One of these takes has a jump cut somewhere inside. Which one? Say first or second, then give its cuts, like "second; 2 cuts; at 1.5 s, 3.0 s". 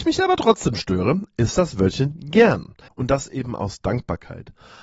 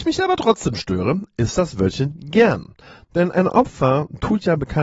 first; 1 cut; at 2.9 s